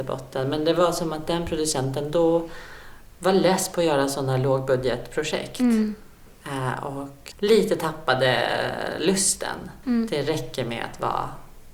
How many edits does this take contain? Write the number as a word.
two